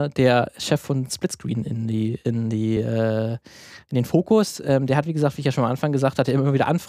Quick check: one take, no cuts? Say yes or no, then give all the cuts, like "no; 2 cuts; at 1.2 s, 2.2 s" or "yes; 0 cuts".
yes; 0 cuts